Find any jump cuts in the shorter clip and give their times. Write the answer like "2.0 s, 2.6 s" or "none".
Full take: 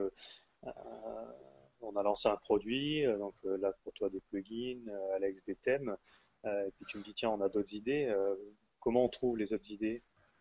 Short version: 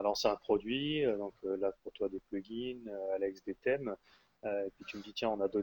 none